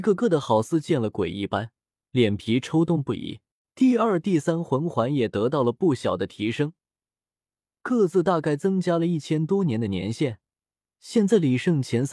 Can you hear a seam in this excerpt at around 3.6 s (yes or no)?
yes